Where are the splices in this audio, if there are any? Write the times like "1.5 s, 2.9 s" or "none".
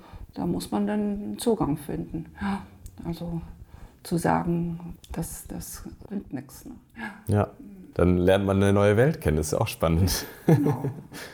5.0 s, 6.1 s, 7.9 s

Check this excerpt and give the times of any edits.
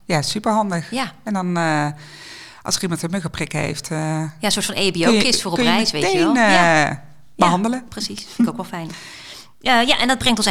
none

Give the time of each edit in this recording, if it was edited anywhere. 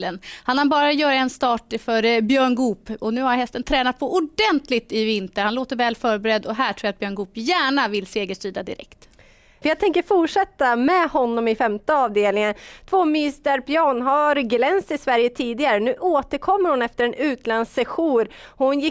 9.6 s

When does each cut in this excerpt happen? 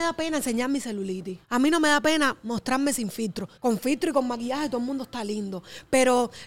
1.4 s, 3.6 s

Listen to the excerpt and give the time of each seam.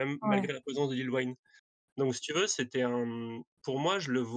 none

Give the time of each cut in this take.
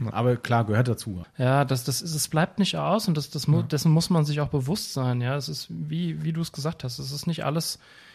1.2 s

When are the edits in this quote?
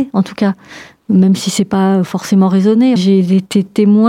3.0 s

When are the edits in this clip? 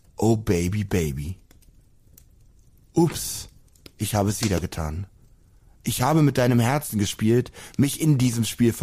none

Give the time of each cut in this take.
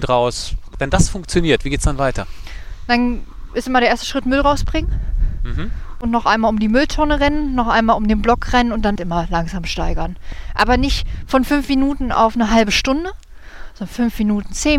9.0 s

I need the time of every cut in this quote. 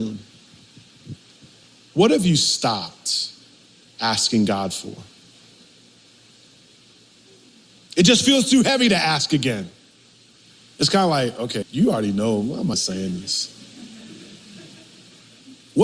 11.6 s, 12.7 s

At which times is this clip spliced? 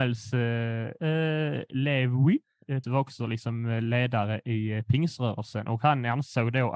1.0 s, 2.8 s

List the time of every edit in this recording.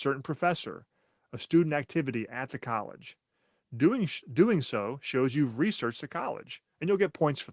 none

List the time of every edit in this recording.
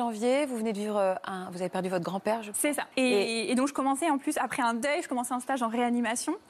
2.9 s

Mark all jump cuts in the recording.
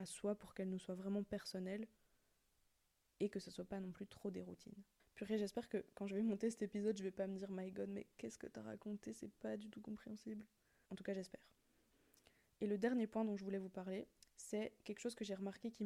5.0 s, 10.9 s, 14.2 s

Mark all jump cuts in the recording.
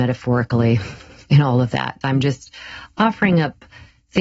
2.0 s

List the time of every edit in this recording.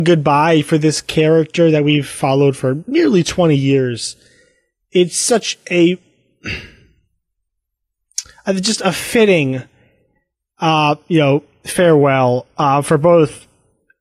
none

